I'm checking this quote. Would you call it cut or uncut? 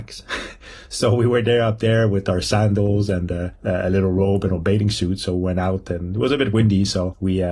uncut